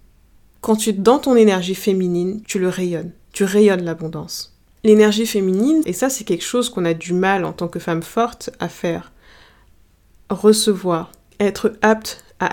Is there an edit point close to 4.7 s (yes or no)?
yes